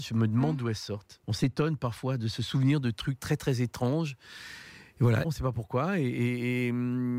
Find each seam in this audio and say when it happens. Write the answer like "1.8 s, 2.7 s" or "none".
1.2 s, 5.2 s